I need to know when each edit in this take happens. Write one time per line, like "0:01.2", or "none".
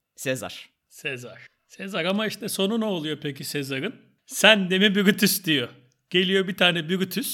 none